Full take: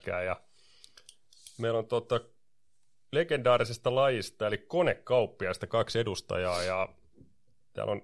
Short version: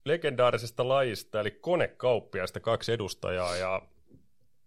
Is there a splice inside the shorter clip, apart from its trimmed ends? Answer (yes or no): no